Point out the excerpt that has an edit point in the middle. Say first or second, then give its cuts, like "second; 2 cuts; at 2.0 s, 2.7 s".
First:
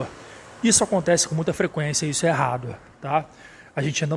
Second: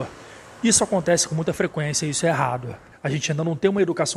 second; 1 cut; at 2.9 s